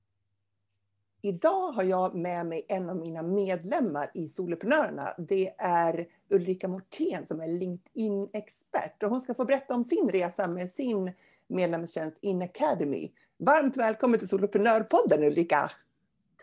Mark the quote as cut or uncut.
uncut